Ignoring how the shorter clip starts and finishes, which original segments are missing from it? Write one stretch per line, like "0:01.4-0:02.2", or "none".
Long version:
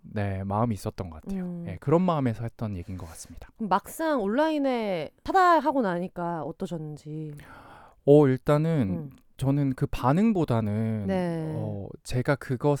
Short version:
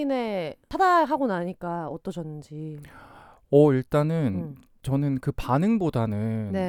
none